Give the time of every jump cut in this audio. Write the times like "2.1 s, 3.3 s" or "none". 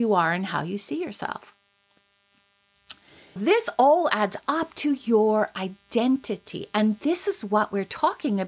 3.4 s